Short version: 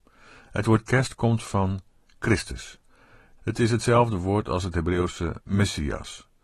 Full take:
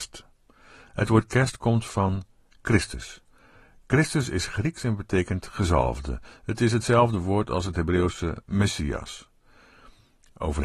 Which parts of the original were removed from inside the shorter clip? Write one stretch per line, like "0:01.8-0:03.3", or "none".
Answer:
0:03.8-0:06.4